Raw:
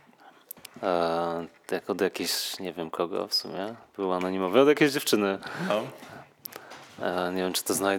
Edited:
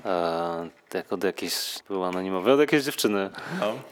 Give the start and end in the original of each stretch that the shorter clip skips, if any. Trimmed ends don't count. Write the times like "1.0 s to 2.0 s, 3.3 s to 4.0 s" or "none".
2.6 s to 3.9 s